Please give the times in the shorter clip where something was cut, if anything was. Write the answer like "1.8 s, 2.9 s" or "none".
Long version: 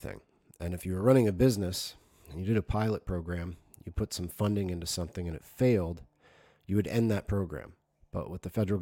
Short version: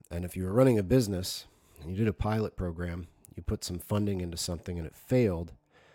none